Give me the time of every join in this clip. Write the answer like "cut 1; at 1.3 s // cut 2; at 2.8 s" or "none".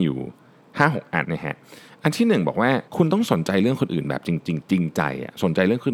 cut 1; at 1.2 s // cut 2; at 2.9 s